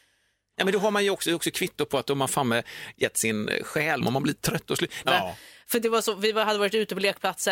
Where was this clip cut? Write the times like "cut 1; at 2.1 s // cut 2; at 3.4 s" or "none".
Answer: cut 1; at 4.0 s // cut 2; at 5.0 s